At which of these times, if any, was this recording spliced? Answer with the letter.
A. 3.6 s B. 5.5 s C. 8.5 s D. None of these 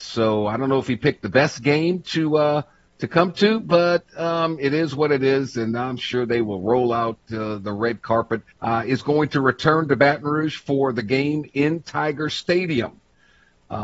C